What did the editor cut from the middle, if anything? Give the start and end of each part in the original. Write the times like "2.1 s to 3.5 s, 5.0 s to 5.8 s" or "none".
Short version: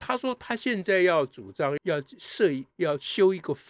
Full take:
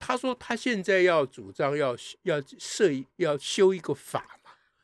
1.8 s to 2.2 s